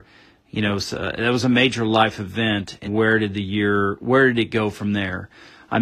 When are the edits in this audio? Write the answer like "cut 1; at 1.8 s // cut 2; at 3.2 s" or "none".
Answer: cut 1; at 2.9 s